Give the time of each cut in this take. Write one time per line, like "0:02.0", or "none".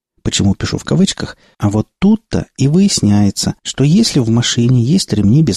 0:01.5
0:03.6